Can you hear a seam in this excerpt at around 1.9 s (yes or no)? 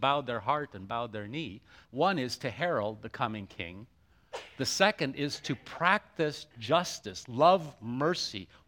yes